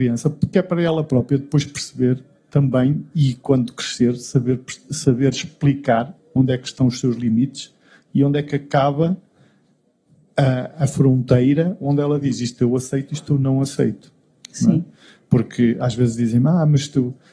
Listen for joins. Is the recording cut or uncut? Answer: uncut